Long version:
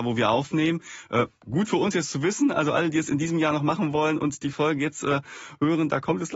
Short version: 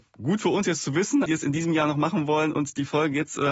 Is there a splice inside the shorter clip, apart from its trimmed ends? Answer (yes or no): yes